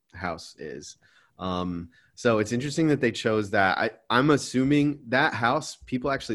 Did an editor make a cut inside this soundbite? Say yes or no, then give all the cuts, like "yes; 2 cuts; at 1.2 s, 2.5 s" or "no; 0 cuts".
no; 0 cuts